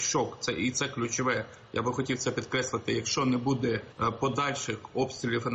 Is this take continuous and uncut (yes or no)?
yes